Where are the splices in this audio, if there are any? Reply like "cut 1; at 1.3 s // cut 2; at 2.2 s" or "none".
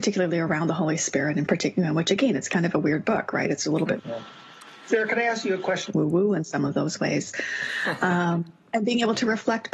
cut 1; at 4.0 s // cut 2; at 5.9 s